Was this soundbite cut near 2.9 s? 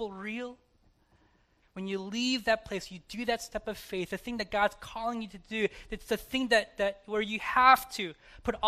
no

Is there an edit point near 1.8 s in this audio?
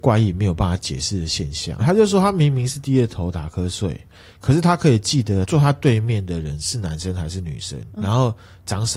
yes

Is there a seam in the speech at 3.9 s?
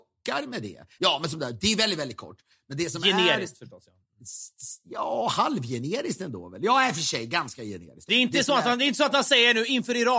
no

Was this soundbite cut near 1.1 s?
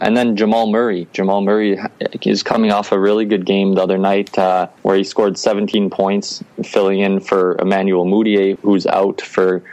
no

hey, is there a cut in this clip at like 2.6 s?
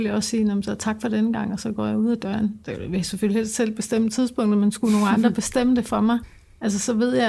no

